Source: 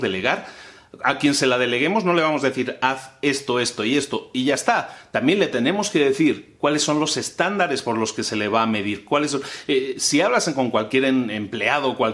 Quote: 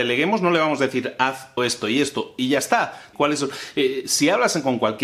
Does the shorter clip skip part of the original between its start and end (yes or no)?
yes